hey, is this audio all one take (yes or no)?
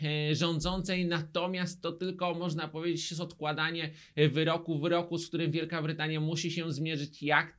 yes